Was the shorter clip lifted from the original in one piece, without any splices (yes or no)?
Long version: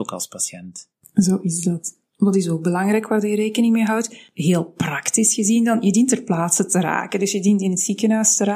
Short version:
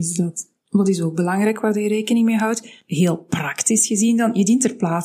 yes